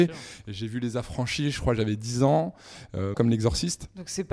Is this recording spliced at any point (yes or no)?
yes